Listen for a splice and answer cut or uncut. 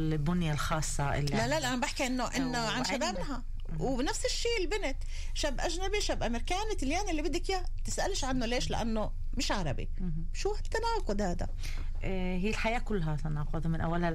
cut